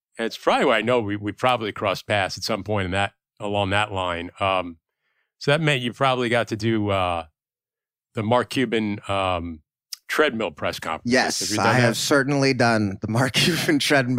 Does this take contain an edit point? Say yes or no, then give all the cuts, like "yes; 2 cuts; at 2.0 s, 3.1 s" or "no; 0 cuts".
no; 0 cuts